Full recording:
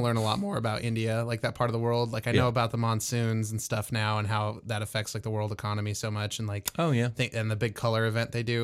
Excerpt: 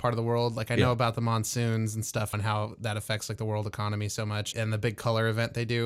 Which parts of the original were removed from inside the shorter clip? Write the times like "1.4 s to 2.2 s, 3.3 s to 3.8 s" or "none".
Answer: 3.9 s to 4.2 s, 6.4 s to 7.3 s